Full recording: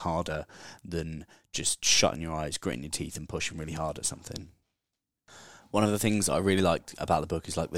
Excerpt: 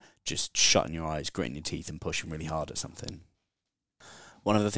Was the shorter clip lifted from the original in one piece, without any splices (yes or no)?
yes